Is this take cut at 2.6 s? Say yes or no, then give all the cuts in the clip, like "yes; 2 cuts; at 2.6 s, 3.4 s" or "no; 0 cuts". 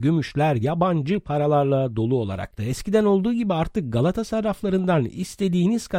yes; 1 cut; at 2.6 s